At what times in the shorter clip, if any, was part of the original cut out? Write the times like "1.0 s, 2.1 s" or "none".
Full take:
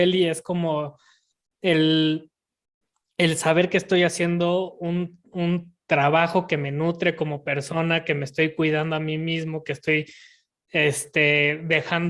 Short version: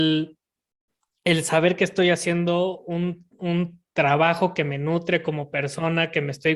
none